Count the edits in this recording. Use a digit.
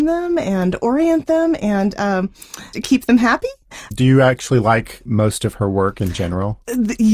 3